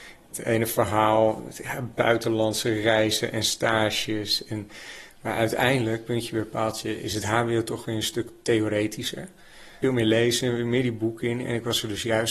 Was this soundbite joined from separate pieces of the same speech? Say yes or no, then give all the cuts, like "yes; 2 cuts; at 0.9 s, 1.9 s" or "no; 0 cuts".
no; 0 cuts